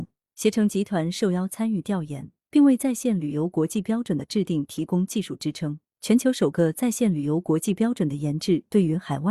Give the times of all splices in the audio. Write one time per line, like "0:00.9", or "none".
0:06.0